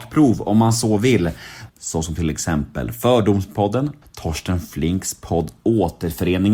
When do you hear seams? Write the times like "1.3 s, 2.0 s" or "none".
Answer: 1.7 s, 4.0 s